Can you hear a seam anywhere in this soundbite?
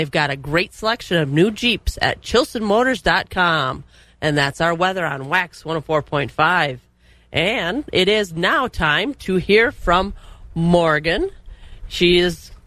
no; 0 cuts

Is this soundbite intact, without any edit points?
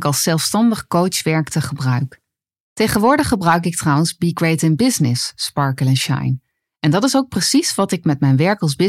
no; 1 cut; at 2.6 s

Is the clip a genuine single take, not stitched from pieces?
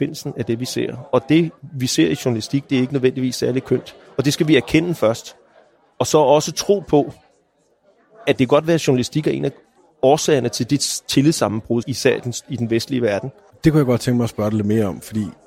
no; 2 cuts; at 11.8 s, 13.5 s

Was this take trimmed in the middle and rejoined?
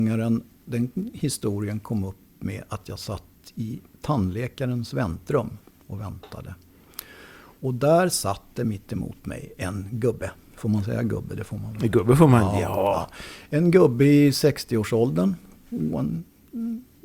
yes; 1 cut; at 15.9 s

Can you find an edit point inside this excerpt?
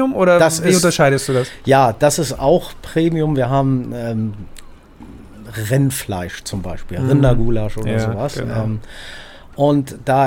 no; 0 cuts

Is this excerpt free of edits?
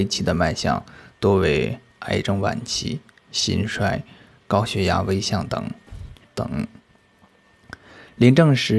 no; 1 cut; at 6.2 s

